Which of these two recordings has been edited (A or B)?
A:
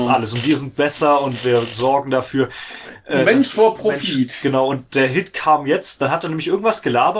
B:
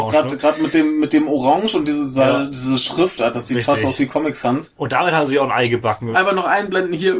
B